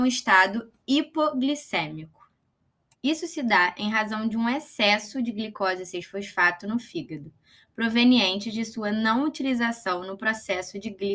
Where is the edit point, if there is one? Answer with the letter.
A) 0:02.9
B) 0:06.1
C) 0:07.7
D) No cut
A